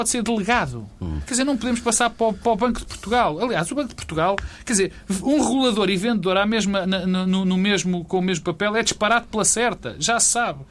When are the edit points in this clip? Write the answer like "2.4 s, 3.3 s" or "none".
6.8 s